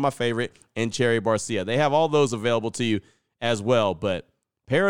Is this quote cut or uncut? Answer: uncut